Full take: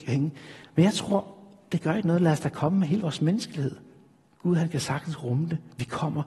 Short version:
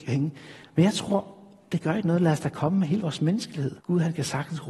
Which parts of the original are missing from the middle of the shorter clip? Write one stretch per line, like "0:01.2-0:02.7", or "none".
0:03.8-0:04.4